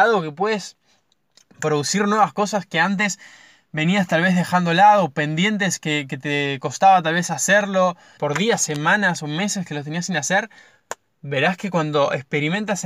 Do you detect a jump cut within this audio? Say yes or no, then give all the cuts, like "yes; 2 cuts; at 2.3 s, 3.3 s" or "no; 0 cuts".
yes; 1 cut; at 8.2 s